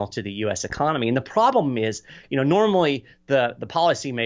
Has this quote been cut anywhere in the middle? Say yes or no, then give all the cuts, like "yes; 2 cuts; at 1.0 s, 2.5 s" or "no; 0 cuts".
no; 0 cuts